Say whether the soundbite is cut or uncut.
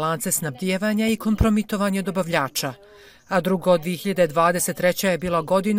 uncut